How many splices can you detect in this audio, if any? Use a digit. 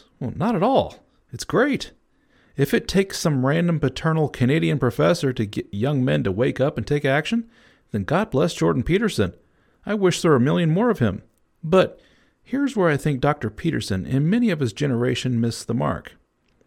0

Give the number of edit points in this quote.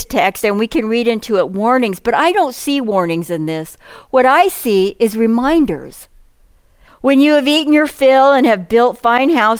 1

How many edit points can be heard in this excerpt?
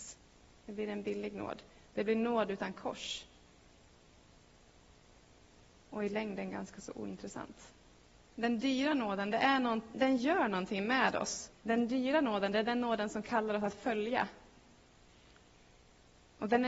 3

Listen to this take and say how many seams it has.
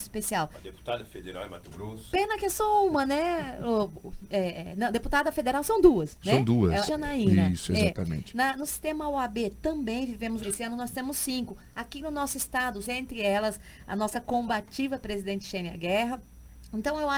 3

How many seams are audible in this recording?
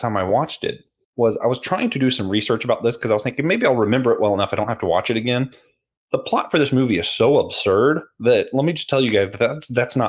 0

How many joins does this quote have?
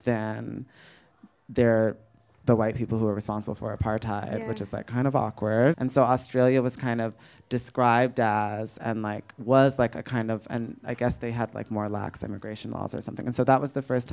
1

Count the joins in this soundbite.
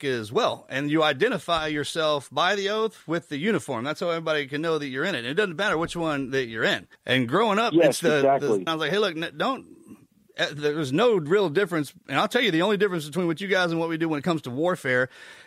2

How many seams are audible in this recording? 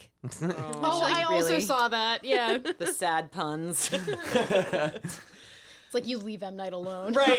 1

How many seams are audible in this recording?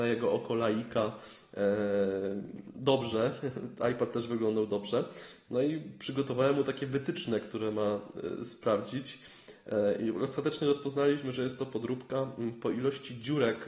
0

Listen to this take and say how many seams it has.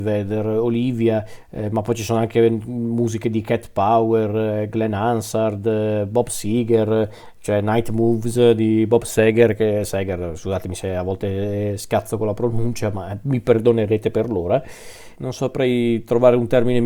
2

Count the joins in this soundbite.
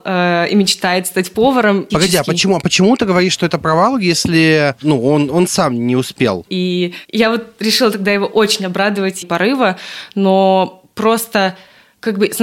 3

